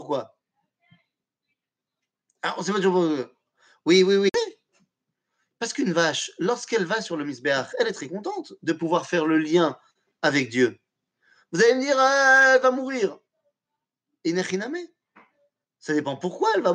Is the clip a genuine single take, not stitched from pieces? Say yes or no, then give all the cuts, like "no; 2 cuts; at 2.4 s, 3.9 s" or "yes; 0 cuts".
yes; 0 cuts